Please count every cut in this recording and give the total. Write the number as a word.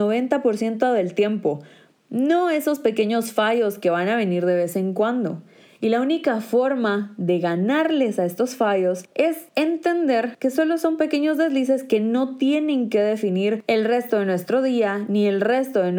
zero